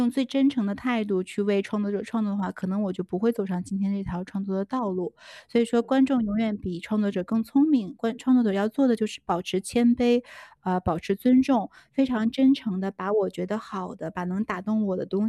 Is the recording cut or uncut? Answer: uncut